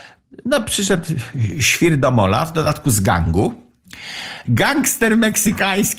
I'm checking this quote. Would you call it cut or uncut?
cut